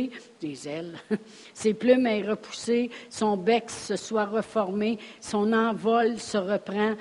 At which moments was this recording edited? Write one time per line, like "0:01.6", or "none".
0:05.2